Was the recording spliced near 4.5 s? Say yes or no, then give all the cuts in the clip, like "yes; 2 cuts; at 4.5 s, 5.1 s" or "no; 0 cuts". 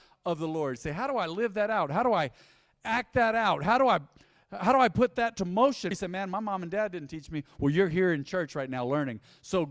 no; 1 cut; at 5.9 s